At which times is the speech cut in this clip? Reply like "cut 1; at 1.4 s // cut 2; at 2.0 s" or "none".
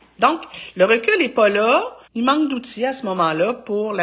cut 1; at 2.1 s